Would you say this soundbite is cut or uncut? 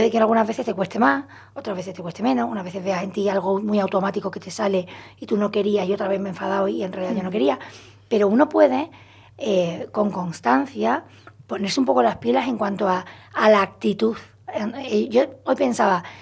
uncut